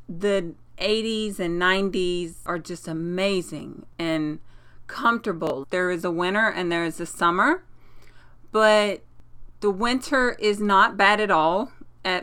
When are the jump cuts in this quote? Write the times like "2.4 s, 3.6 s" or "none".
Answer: 5.6 s